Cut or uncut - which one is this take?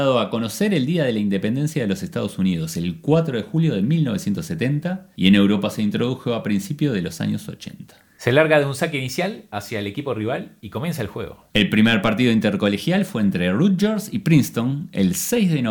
cut